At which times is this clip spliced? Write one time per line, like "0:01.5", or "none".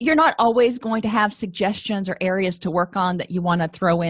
none